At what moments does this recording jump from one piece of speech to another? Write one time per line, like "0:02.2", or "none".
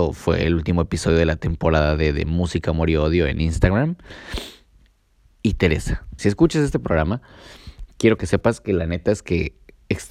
0:06.2